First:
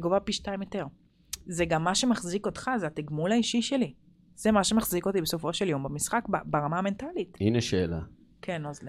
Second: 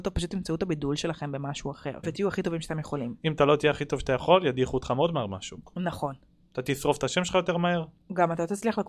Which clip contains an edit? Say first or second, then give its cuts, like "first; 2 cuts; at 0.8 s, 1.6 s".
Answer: second; 1 cut; at 2.0 s